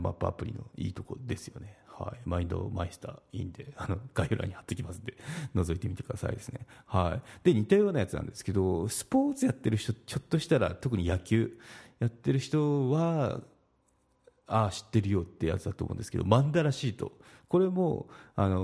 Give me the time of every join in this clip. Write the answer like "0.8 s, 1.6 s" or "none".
none

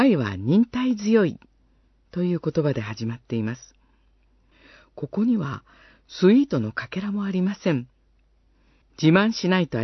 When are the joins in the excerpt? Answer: 8.8 s

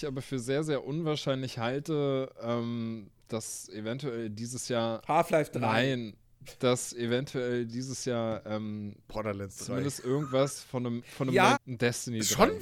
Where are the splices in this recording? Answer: 9.0 s, 11.5 s

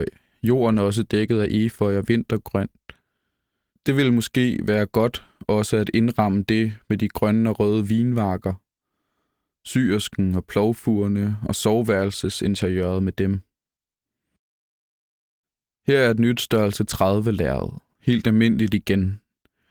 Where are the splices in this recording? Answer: 3.7 s

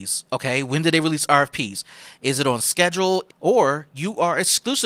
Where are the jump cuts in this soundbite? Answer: 3.3 s

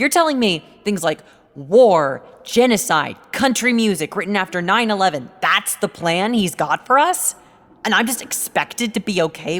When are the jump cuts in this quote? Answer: none

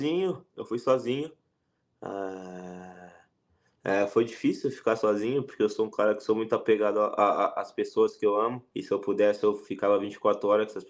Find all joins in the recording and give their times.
8.7 s

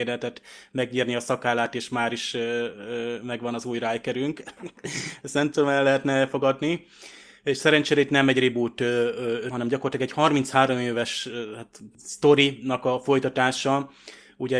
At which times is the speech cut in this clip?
9.5 s

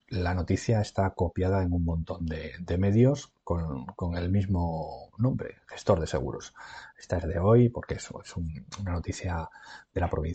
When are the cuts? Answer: none

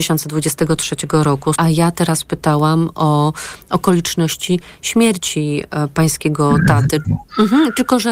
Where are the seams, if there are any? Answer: 1.6 s, 7.0 s

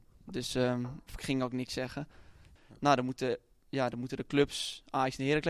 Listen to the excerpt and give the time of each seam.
2.6 s

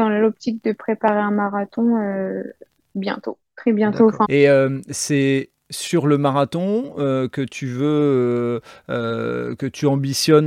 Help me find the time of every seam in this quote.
4.2 s

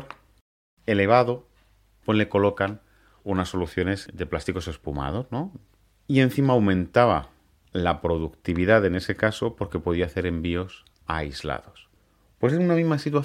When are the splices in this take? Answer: 5.8 s, 10.9 s

